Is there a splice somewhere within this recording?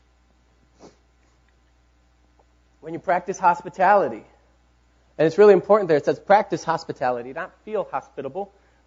no; 0 cuts

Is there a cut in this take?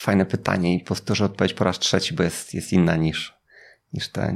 no; 0 cuts

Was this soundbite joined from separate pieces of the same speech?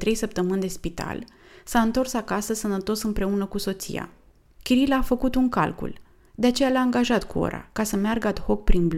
yes; 2 cuts; at 4.6 s, 6.3 s

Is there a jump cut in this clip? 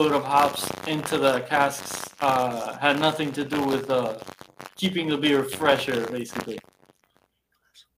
no; 0 cuts

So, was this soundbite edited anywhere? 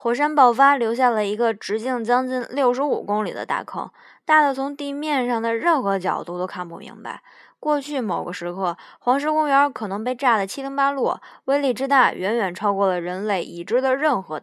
no; 0 cuts

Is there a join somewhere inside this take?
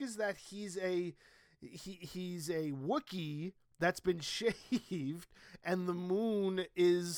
no; 0 cuts

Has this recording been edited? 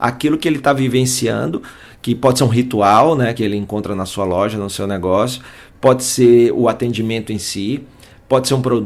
no; 0 cuts

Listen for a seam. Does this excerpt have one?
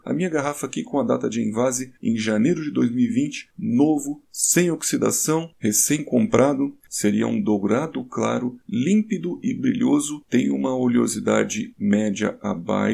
no; 0 cuts

